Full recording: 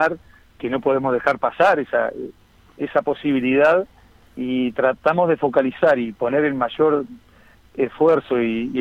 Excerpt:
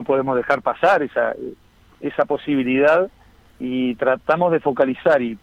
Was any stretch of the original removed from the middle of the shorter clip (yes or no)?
no